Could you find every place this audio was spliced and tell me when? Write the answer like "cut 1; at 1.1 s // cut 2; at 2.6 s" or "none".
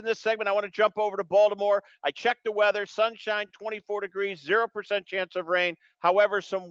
none

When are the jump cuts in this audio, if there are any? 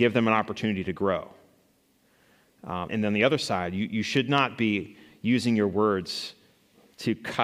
cut 1; at 2.9 s

